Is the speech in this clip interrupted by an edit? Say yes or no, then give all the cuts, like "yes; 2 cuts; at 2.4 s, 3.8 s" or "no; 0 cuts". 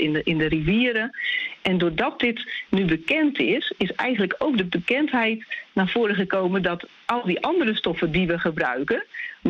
no; 0 cuts